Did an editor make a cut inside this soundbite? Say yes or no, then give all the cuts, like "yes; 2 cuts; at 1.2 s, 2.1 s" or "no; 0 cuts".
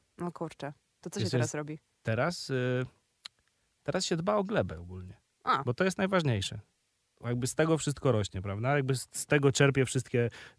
no; 0 cuts